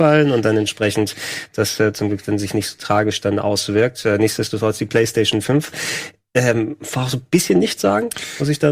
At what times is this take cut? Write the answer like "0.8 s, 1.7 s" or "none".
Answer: none